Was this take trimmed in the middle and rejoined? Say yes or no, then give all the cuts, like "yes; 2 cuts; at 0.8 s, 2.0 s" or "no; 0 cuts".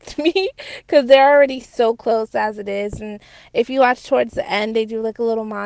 no; 0 cuts